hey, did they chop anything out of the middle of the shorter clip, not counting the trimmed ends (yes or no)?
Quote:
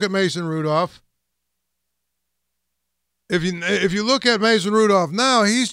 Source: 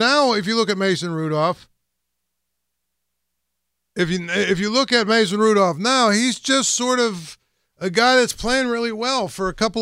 no